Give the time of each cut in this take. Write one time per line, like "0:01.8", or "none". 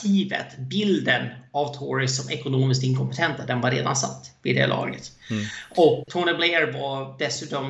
0:06.1